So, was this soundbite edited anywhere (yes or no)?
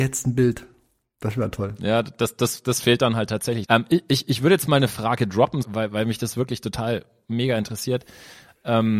yes